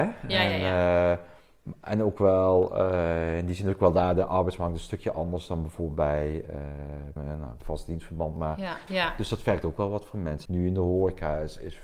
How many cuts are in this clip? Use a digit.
3